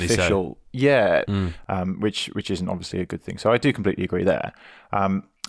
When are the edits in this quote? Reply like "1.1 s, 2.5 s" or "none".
1.3 s